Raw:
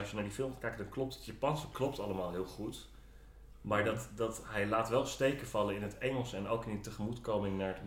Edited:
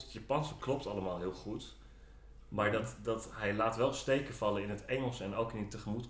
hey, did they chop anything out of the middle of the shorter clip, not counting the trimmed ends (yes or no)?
no